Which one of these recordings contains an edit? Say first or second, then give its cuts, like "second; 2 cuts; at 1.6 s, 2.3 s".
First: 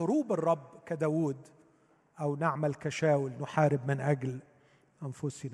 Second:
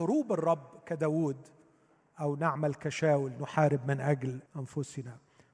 second; 1 cut; at 4.5 s